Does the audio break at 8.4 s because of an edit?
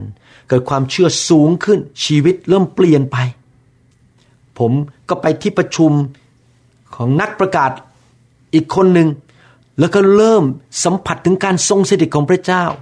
no; 1 cut; at 1.9 s

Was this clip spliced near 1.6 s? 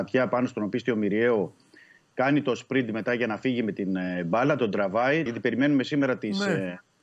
no; 1 cut; at 5.3 s

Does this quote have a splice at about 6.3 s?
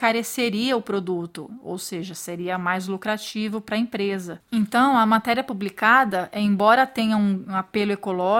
no; 1 cut; at 4.4 s

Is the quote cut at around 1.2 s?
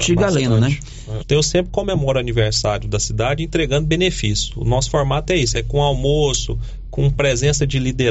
yes; 2 cuts; at 1.2 s, 5.5 s

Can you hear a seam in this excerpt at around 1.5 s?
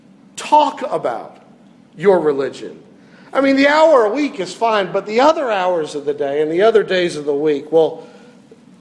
no; 0 cuts

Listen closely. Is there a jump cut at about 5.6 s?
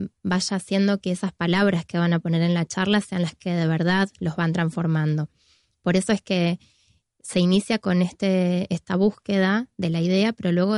no; 0 cuts

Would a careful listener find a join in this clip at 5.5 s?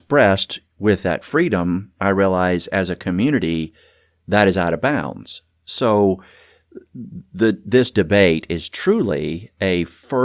no; 0 cuts

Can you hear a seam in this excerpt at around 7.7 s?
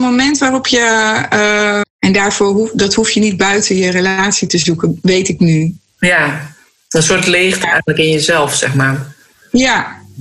no; 1 cut; at 1.8 s

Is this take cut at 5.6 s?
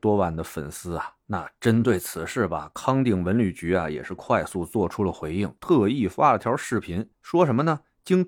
no; 1 cut; at 1.2 s

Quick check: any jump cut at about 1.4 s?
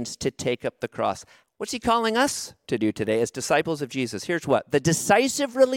yes; 1 cut; at 1.4 s

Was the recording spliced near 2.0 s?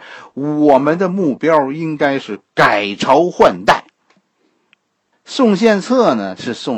no; 1 cut; at 5.1 s

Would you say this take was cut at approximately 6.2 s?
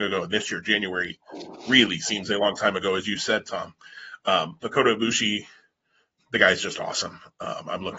yes; 1 cut; at 6.2 s

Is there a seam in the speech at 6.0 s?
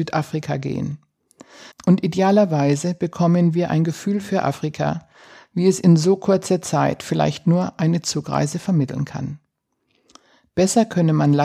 no; 1 cut; at 1.7 s

